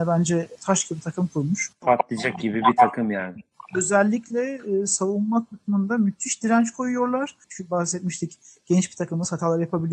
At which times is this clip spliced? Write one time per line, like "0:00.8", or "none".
0:01.8
0:07.4